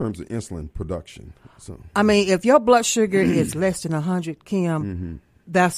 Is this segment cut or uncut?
uncut